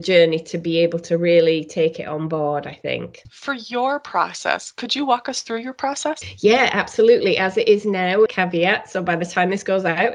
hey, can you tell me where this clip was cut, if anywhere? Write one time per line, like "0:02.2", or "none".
0:08.3